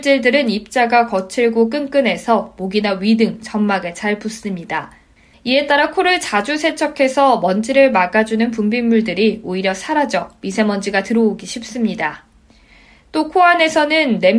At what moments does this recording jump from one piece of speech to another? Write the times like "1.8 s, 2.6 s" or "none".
5.3 s